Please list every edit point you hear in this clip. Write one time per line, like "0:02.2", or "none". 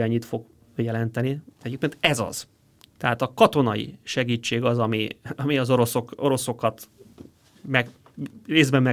none